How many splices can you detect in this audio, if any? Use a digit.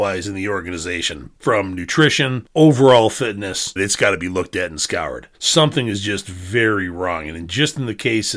2